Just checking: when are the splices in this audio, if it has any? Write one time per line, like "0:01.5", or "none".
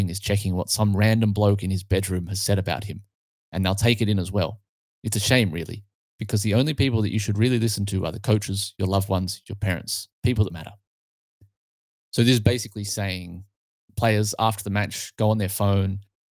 0:10.5